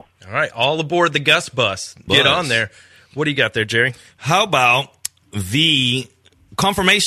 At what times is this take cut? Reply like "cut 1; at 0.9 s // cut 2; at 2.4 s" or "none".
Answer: cut 1; at 2.1 s